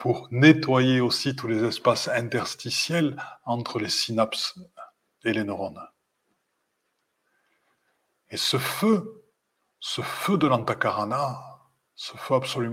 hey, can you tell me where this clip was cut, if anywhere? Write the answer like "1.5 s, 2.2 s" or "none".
none